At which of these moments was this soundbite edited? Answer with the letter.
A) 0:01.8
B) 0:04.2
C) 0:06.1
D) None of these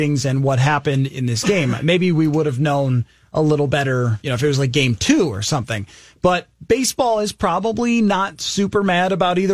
B